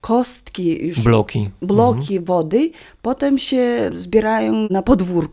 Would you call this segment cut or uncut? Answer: uncut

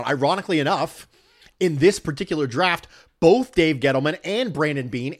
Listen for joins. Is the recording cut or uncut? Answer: uncut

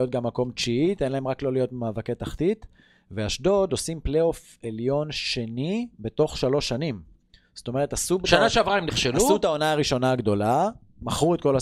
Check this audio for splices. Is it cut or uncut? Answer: uncut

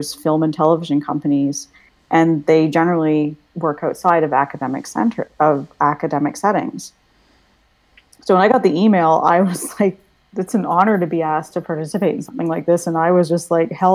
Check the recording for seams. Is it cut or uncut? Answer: uncut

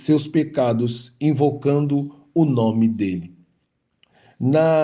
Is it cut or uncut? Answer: uncut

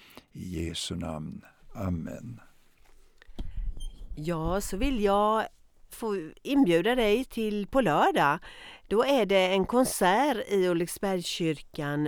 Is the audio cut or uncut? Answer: cut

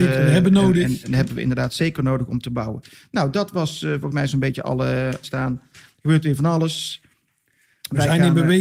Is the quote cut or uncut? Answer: cut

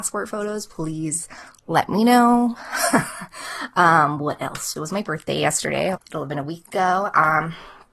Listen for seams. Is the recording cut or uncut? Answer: cut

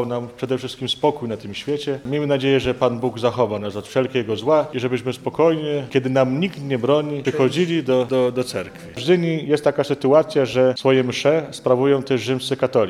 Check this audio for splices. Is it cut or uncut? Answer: uncut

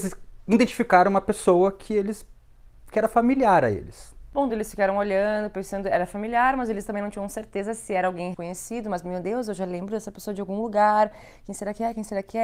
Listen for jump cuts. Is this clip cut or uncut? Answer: cut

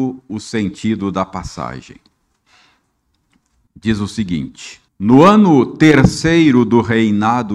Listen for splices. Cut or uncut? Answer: cut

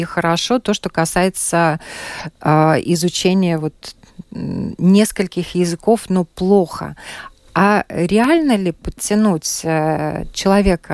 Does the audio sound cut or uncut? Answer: uncut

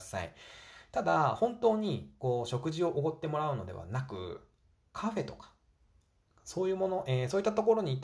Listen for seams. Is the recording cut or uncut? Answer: uncut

